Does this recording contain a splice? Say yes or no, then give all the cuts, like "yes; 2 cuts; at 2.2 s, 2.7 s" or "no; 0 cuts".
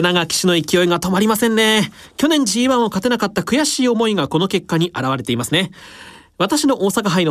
no; 0 cuts